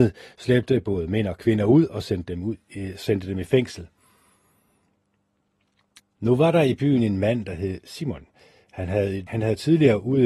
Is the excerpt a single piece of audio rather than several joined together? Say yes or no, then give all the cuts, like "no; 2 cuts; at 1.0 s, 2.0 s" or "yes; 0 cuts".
no; 2 cuts; at 6.0 s, 9.3 s